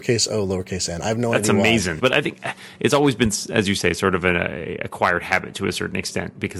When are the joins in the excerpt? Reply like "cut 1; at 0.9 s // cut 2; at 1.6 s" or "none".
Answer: cut 1; at 2.0 s